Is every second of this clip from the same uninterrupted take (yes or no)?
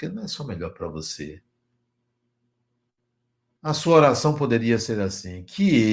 no